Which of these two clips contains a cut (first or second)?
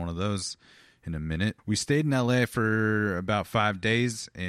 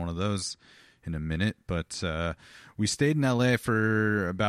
first